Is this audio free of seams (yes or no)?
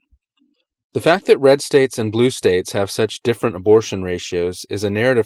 yes